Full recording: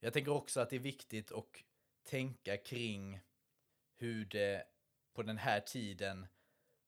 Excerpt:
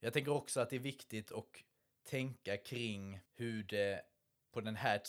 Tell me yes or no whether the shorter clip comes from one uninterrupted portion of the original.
no